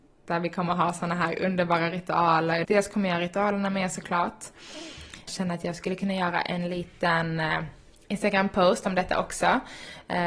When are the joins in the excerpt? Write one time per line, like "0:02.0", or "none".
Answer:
0:02.6
0:05.3